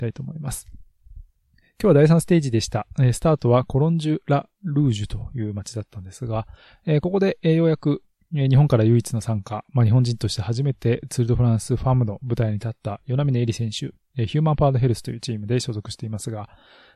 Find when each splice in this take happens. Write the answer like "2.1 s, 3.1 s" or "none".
none